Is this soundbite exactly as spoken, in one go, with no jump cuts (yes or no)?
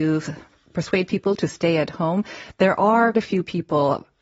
no